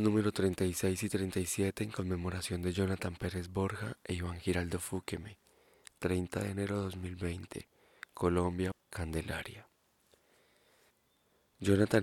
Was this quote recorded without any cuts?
no; 1 cut; at 8.7 s

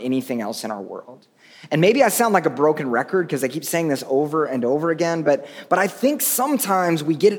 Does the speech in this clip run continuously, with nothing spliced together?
yes; 0 cuts

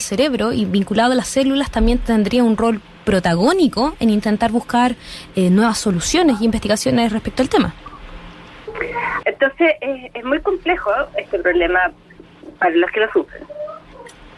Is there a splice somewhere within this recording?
yes; 1 cut; at 9.2 s

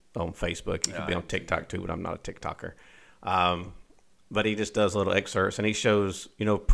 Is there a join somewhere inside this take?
no; 0 cuts

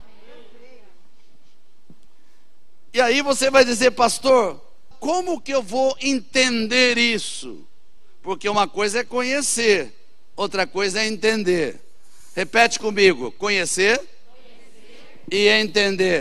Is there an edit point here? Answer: yes; 1 cut; at 4.9 s

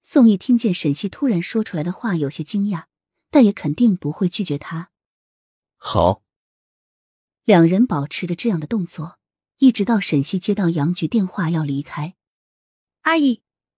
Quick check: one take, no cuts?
yes; 0 cuts

